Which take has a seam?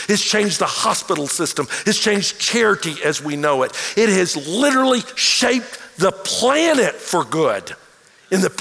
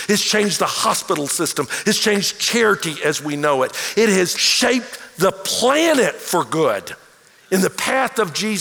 second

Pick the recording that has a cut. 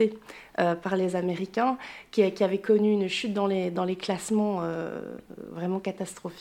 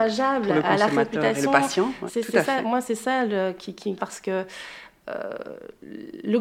second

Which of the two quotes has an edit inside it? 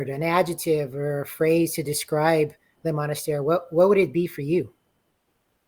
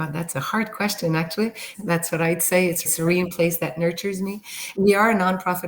second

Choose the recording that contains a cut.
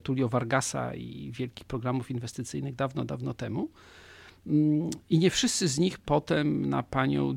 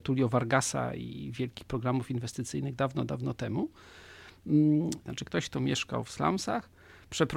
second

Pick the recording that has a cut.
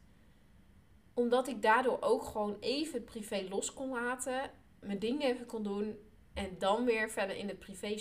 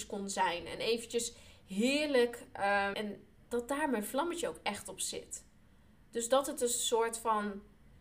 second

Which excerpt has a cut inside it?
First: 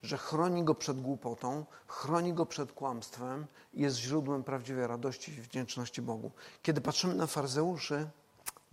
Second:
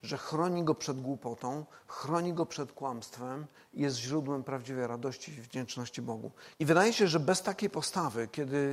second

